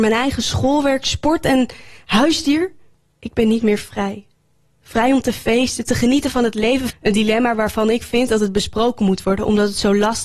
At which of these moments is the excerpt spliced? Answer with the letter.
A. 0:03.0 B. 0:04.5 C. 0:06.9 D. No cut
C